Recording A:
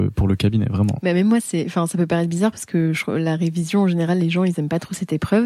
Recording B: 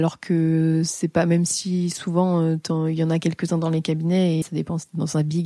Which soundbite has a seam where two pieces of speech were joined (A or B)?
B